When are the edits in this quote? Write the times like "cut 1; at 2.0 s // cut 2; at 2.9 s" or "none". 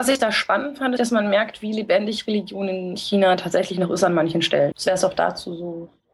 cut 1; at 1.0 s // cut 2; at 4.7 s